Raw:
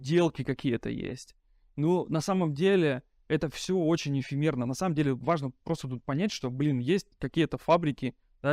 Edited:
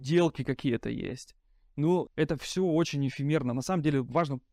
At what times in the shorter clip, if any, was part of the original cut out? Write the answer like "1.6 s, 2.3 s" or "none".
2.1 s